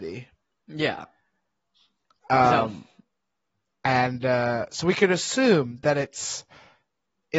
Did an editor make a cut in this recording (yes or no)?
no